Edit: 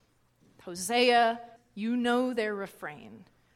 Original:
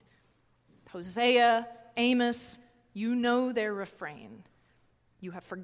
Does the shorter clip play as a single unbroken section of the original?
no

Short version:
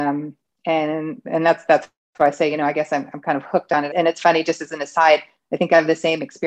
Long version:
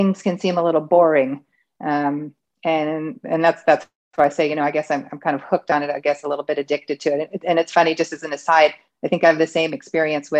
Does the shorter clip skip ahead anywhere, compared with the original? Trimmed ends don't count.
yes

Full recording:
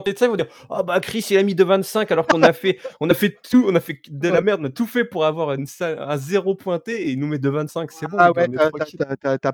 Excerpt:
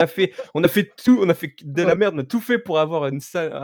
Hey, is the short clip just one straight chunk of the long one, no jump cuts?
yes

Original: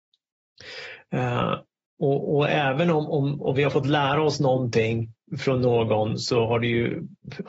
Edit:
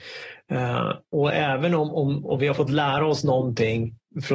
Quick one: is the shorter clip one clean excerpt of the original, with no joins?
no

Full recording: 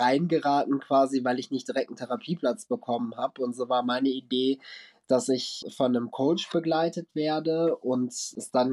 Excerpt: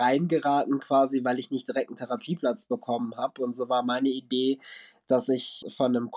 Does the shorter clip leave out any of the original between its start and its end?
no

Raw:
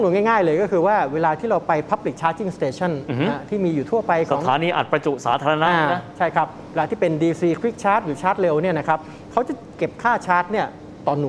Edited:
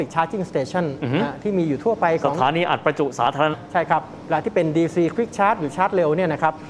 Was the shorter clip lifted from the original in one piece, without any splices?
no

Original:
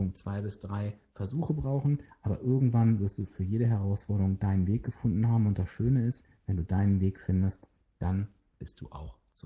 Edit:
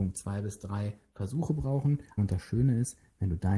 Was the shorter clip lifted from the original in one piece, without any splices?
no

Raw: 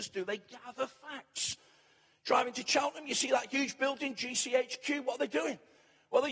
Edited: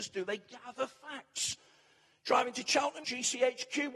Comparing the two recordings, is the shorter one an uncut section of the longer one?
no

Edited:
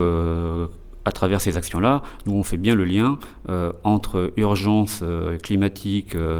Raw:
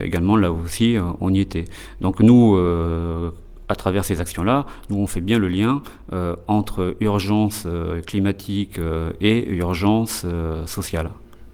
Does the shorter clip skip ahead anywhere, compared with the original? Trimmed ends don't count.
no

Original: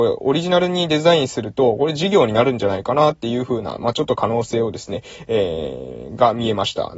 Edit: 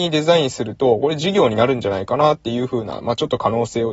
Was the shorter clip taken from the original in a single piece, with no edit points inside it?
yes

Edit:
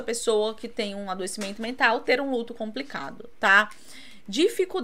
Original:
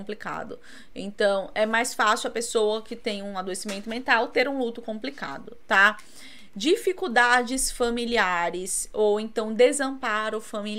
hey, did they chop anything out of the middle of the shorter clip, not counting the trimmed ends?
no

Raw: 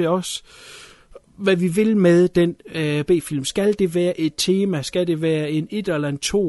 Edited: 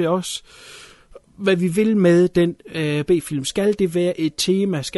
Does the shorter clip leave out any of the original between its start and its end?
no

